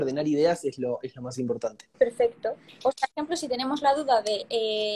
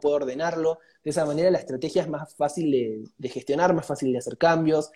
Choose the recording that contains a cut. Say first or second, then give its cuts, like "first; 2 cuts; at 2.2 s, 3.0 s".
first; 2 cuts; at 1.9 s, 3.1 s